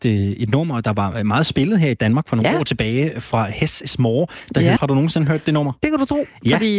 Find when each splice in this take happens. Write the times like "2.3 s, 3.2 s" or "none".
4.8 s